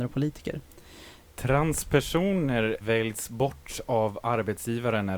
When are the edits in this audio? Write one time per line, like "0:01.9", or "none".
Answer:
0:01.2
0:02.8